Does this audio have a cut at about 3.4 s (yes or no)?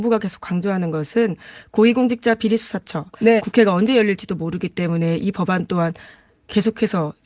yes